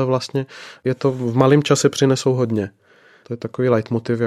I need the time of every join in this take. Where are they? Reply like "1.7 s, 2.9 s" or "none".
3.2 s